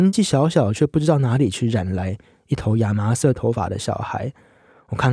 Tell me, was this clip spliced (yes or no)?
no